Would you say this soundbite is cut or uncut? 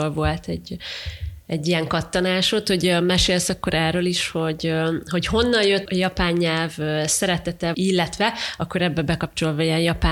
cut